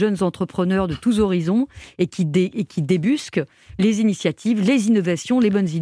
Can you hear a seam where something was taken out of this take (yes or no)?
no